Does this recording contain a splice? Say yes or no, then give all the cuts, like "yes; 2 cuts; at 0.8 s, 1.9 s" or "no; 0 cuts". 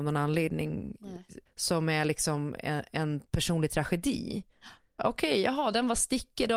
yes; 2 cuts; at 1.5 s, 5.0 s